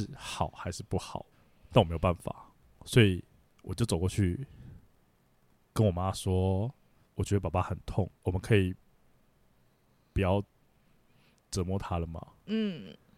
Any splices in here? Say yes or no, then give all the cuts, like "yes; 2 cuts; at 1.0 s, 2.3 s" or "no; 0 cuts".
yes; 1 cut; at 8.1 s